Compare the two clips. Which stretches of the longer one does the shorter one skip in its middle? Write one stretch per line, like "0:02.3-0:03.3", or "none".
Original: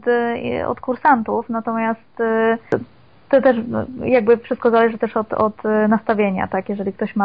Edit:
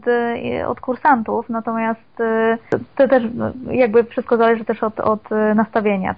0:02.9-0:03.2